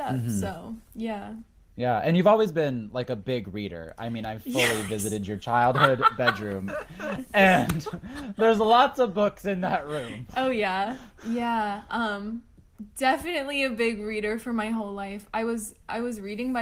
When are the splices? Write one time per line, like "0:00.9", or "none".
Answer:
none